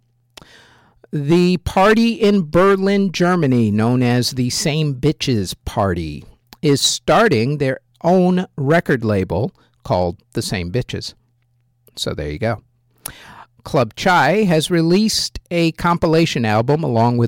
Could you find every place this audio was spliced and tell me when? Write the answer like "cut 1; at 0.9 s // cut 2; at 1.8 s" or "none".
cut 1; at 13.6 s

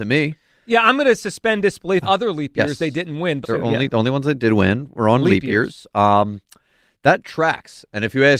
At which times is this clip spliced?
cut 1; at 2.0 s // cut 2; at 3.4 s

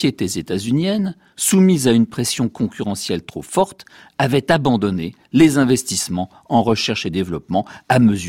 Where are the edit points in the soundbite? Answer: none

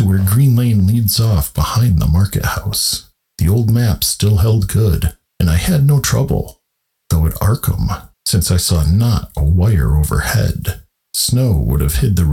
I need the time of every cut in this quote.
cut 1; at 8.1 s

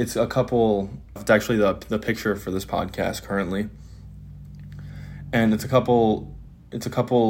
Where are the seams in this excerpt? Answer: none

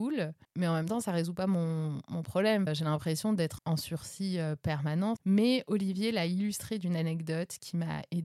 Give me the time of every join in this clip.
cut 1; at 3.6 s

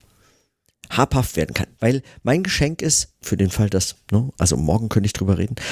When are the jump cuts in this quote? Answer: cut 1; at 1.8 s // cut 2; at 3.2 s

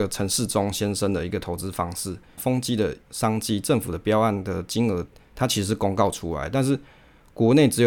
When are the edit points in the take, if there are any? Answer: cut 1; at 2.4 s

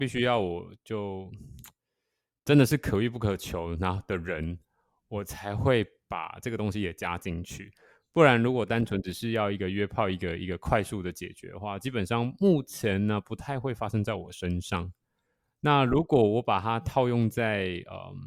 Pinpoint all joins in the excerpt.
none

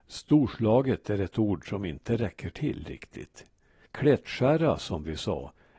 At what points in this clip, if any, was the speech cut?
cut 1; at 3.9 s

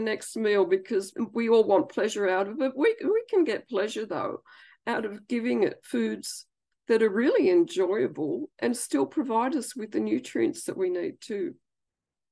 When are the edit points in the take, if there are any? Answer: none

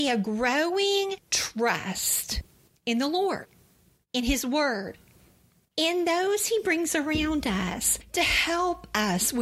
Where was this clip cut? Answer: none

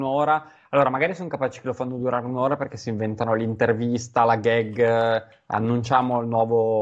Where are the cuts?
none

